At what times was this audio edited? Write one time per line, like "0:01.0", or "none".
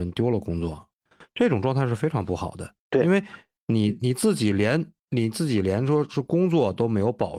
0:01.1
0:02.8